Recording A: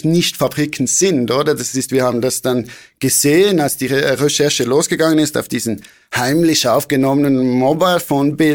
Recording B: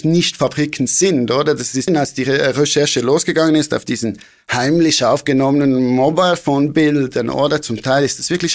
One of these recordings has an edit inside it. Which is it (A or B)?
B